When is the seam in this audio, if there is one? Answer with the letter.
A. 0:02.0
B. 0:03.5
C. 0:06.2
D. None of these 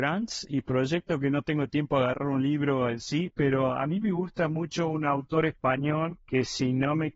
C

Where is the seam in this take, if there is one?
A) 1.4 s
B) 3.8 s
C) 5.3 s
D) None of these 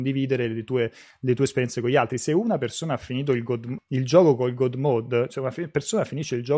B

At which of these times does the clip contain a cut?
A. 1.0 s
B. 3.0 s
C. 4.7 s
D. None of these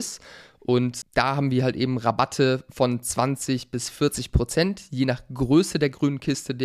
A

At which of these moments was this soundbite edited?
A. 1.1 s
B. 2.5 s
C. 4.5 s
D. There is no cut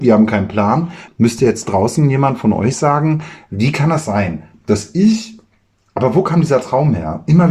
A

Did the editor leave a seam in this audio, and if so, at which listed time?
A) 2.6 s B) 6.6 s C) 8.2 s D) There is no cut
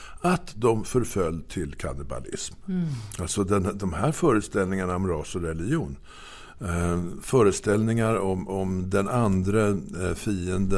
B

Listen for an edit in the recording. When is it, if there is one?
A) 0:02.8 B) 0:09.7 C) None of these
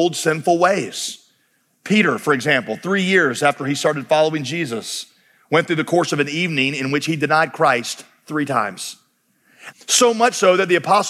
B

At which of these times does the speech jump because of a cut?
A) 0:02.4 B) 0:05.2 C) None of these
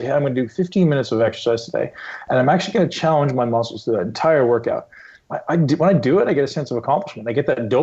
C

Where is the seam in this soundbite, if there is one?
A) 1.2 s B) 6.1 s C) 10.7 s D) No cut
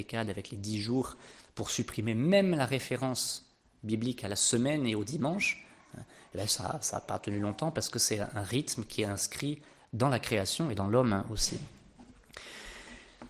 C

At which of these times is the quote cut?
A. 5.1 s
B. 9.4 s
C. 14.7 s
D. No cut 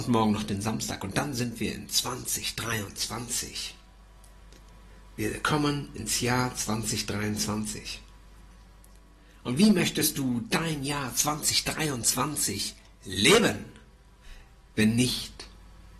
C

